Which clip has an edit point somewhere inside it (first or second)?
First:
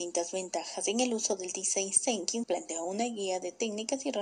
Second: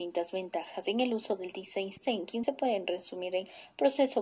first